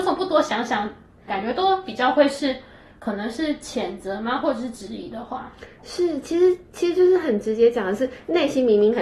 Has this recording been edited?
yes; 1 cut; at 1.3 s

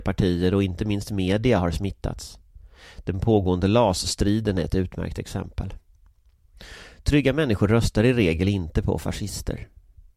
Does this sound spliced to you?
no; 0 cuts

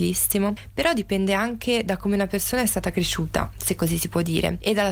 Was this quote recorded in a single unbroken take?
yes; 0 cuts

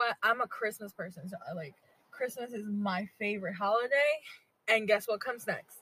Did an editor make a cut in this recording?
no; 0 cuts

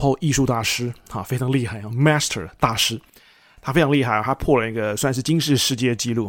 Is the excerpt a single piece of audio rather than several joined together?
yes; 0 cuts

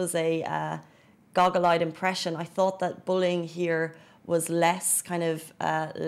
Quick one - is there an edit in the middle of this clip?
no; 0 cuts

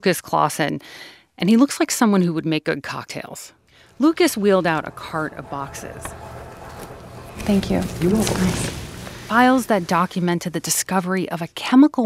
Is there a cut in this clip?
no; 0 cuts

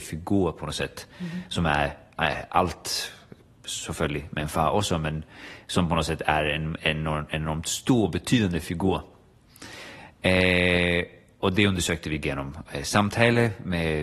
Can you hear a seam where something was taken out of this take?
no; 0 cuts

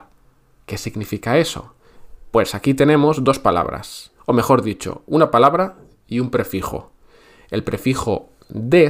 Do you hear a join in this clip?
no; 0 cuts

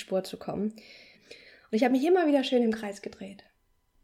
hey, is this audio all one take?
no; 1 cut; at 1.1 s

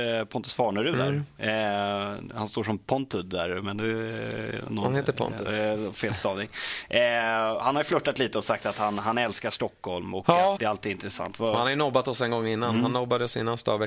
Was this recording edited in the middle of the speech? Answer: yes; 1 cut; at 10.6 s

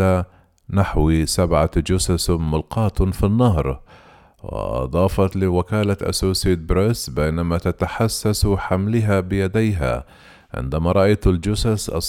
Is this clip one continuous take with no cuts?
yes; 0 cuts

